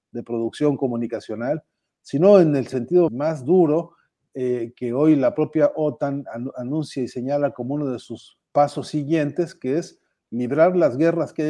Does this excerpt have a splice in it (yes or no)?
yes